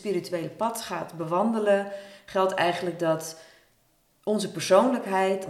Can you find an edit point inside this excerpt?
no; 0 cuts

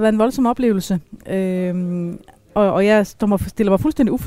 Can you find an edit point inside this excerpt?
no; 0 cuts

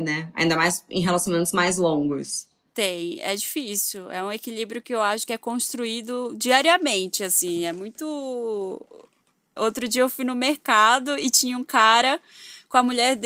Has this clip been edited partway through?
yes; 1 cut; at 9.6 s

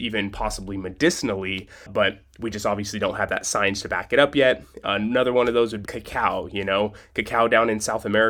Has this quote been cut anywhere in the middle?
yes; 2 cuts; at 1.9 s, 5.9 s

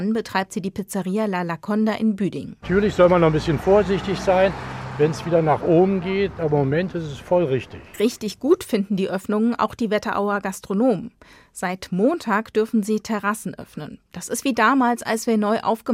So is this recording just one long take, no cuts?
no; 3 cuts; at 2.6 s, 6.4 s, 14.0 s

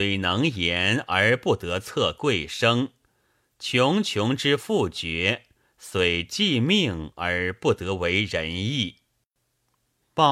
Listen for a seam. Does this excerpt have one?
no; 0 cuts

